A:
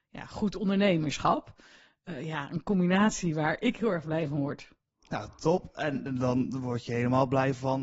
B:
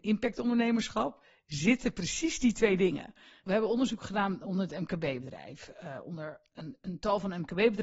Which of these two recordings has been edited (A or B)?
B